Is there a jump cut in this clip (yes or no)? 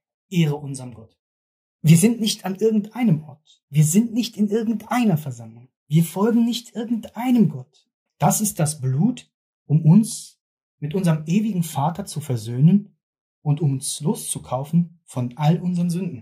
yes